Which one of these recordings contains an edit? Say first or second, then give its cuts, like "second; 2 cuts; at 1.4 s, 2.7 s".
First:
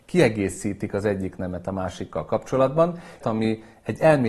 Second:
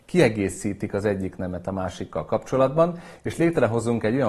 first; 1 cut; at 3.2 s